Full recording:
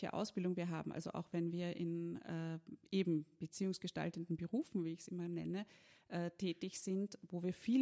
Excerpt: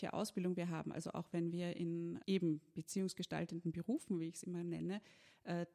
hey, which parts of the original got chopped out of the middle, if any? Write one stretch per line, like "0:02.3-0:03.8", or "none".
0:02.2-0:02.9